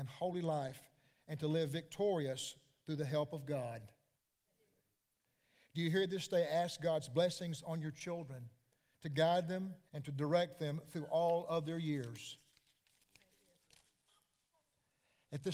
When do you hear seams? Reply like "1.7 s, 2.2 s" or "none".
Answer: 9.9 s